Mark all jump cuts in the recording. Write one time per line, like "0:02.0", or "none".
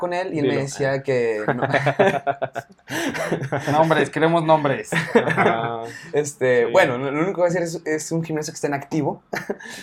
none